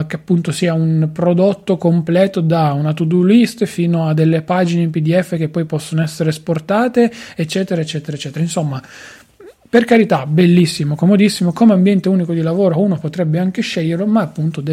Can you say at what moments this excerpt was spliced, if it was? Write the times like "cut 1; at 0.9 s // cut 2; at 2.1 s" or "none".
none

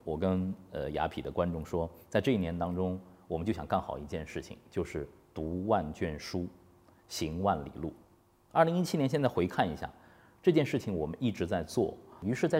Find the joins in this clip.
none

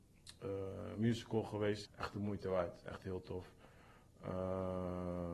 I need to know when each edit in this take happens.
cut 1; at 1.8 s

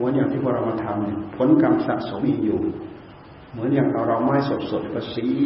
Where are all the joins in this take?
cut 1; at 2.2 s

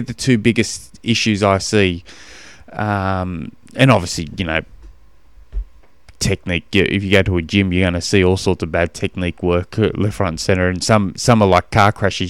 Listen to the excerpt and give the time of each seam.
none

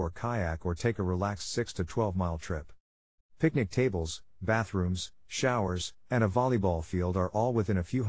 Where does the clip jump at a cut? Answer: cut 1; at 3.2 s

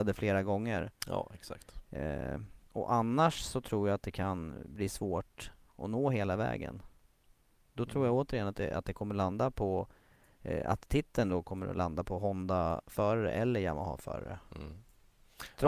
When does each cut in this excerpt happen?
none

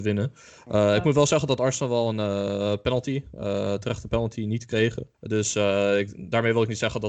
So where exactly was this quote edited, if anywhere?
cut 1; at 5.1 s

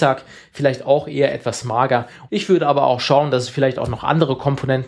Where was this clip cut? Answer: cut 1; at 2.3 s

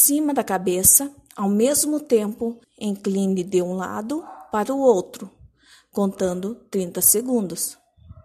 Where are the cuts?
cut 1; at 2.6 s

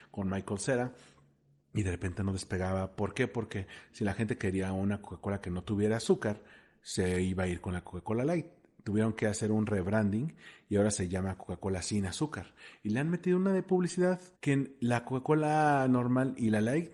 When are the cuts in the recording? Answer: cut 1; at 14.3 s

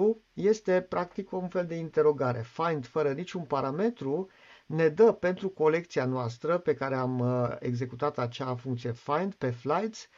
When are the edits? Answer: none

